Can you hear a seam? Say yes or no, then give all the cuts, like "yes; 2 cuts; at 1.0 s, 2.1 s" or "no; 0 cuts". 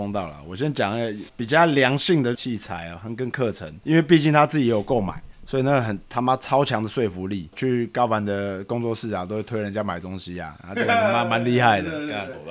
yes; 3 cuts; at 1.3 s, 2.3 s, 7.5 s